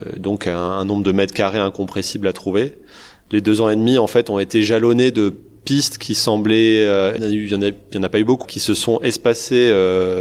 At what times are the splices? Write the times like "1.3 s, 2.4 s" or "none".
7.2 s, 8.4 s